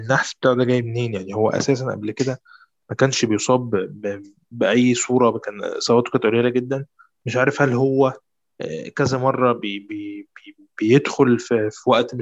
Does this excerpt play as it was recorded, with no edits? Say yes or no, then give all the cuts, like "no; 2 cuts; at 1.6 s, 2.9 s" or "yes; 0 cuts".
yes; 0 cuts